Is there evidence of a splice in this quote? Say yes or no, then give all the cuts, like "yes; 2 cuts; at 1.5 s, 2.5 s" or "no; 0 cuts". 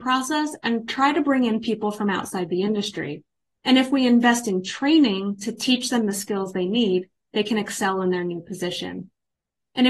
no; 0 cuts